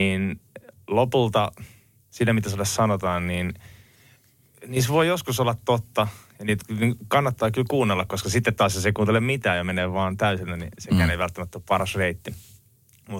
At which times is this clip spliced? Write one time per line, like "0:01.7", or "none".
none